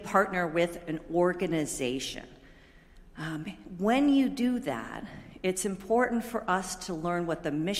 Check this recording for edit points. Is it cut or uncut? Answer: uncut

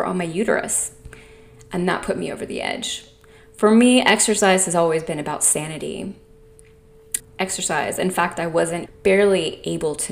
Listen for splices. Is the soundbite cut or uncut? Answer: cut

